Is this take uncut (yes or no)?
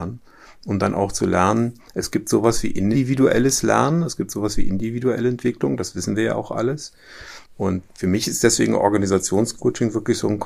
no